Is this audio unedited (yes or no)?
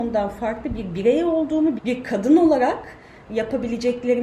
no